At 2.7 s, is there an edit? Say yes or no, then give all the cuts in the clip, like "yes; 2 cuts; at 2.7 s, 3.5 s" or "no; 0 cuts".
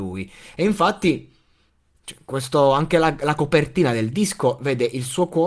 no; 0 cuts